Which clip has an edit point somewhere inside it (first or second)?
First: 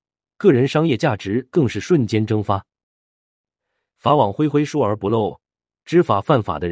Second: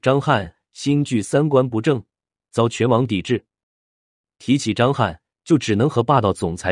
second